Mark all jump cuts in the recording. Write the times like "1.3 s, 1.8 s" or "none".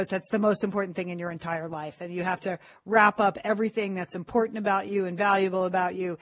none